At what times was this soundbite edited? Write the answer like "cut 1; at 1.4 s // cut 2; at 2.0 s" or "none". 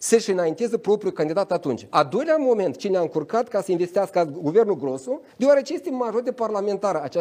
cut 1; at 1.9 s // cut 2; at 5.3 s